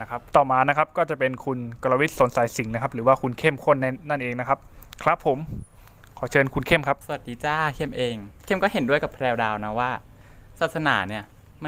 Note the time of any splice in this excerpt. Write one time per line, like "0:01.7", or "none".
none